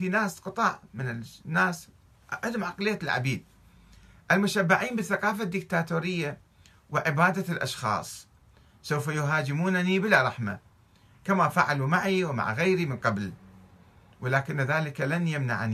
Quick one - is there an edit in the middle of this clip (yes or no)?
no